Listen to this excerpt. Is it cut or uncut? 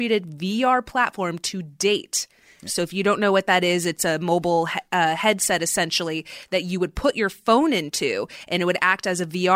cut